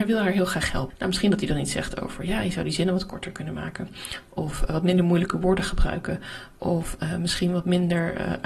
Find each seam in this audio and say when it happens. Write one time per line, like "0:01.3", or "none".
0:00.9